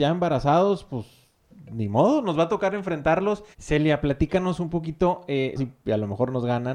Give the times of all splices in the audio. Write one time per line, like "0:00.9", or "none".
0:03.5
0:05.6